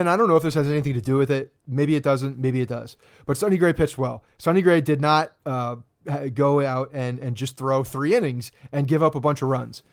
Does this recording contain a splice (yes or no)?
no